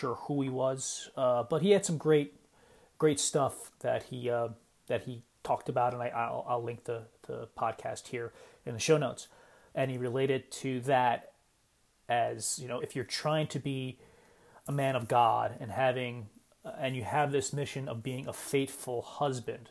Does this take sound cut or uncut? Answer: cut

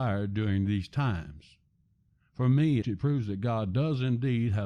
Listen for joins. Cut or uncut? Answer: cut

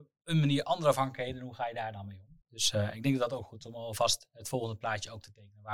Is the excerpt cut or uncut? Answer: cut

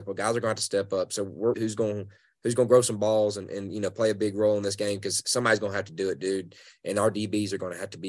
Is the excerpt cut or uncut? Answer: cut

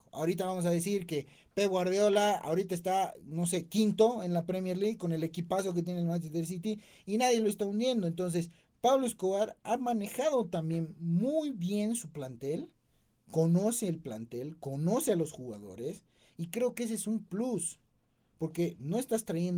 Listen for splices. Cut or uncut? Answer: uncut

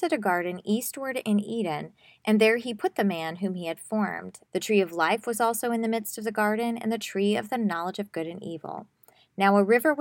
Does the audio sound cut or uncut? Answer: cut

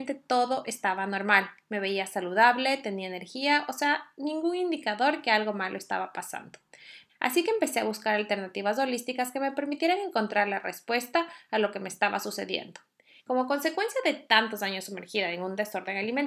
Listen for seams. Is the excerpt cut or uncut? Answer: cut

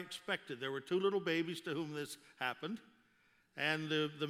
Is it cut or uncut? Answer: uncut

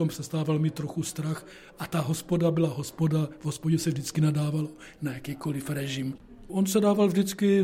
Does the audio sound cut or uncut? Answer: cut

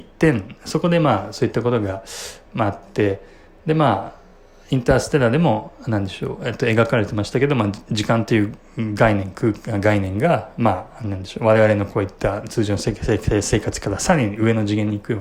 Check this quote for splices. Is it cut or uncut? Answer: uncut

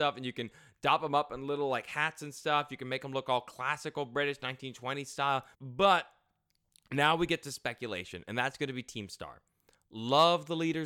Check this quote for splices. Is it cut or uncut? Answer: cut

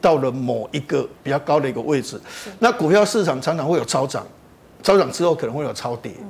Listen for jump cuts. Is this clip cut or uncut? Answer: uncut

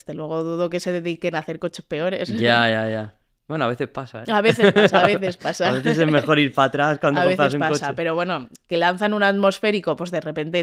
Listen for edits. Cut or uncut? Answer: uncut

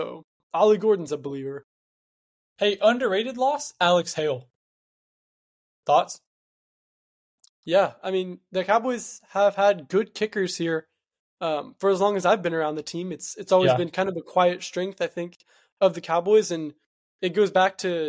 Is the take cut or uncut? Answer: uncut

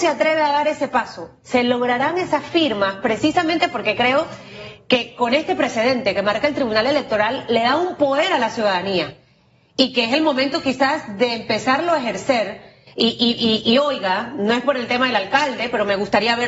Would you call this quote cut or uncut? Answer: uncut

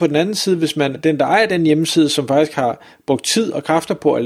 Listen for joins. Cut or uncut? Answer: cut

